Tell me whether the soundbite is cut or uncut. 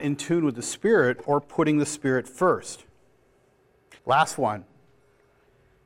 cut